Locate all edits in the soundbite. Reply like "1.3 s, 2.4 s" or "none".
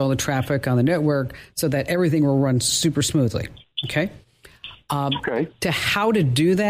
none